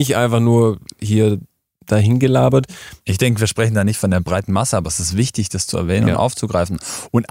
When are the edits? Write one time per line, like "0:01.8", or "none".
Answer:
0:03.0